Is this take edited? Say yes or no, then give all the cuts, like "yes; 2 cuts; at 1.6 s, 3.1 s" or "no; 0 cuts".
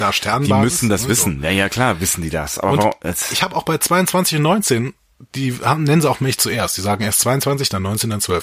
no; 0 cuts